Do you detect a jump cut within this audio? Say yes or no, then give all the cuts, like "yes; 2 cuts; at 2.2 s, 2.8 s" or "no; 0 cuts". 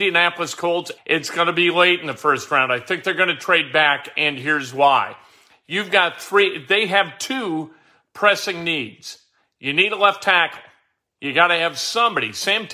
yes; 1 cut; at 1.0 s